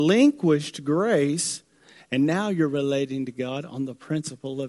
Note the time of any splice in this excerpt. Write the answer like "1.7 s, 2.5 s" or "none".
2.0 s